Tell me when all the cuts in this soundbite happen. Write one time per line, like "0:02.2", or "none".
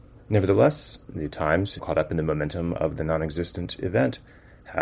0:01.8

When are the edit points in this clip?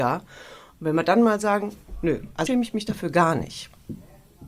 0:02.5

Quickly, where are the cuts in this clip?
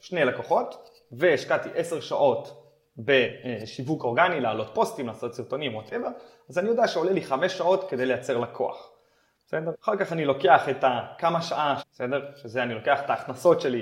0:09.7
0:11.8

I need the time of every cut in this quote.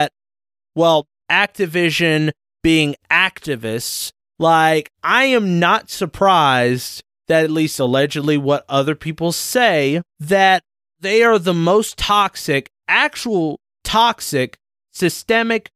0:01.2
0:04.2
0:10.1

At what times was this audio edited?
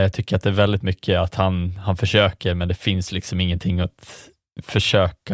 none

